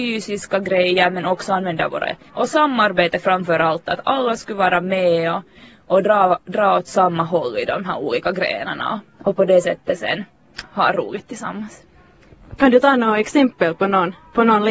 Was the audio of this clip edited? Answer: yes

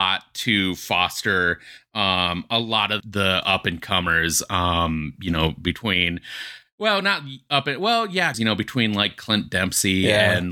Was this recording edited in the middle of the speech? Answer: yes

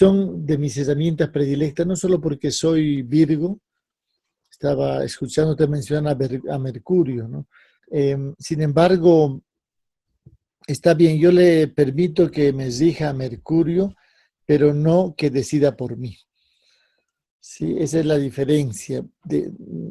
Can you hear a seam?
yes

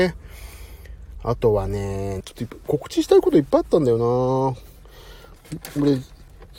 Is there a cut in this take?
yes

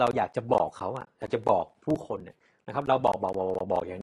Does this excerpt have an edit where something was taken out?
no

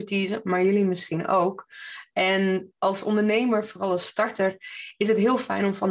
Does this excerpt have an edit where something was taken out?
no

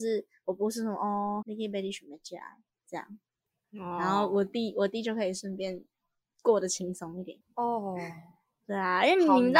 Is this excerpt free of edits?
no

